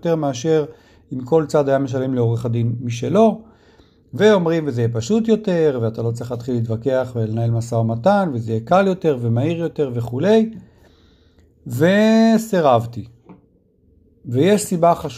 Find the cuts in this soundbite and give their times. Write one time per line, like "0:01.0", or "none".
none